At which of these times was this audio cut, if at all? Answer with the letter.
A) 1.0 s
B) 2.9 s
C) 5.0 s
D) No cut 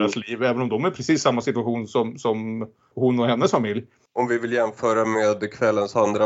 B